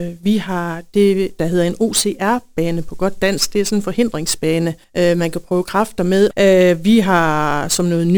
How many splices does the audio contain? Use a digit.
2